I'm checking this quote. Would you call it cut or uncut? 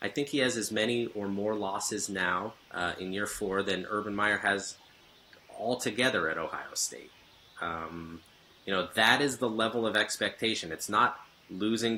cut